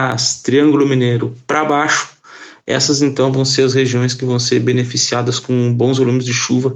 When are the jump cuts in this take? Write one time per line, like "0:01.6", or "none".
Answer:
none